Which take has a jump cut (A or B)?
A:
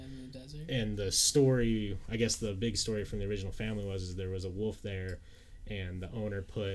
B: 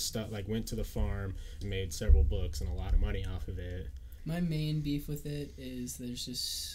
B